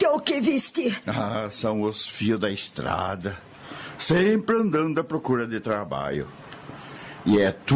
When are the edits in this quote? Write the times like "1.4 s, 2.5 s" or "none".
none